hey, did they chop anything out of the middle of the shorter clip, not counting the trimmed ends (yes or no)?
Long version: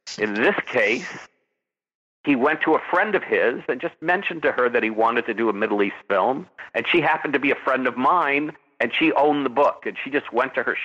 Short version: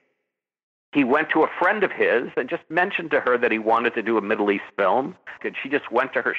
yes